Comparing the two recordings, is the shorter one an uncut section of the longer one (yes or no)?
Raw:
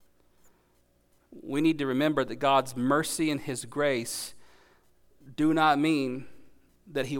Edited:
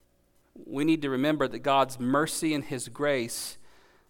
yes